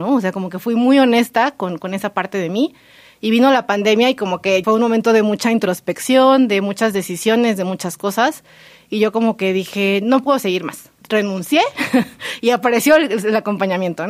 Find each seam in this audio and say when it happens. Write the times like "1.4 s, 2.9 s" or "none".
4.6 s, 11.0 s